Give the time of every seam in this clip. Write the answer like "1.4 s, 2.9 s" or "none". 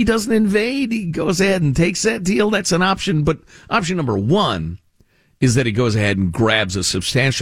none